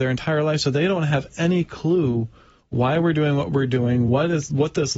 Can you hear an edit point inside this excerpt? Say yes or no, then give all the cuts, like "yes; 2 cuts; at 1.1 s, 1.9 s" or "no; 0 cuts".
no; 0 cuts